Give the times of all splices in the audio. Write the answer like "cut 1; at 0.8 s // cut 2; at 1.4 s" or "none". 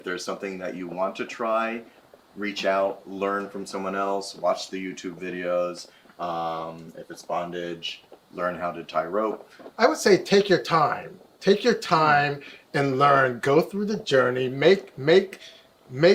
cut 1; at 9.7 s